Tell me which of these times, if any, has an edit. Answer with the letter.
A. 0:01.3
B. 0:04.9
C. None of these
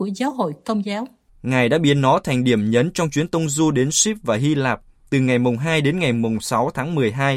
A